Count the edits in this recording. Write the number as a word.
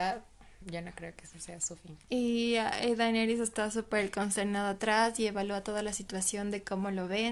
one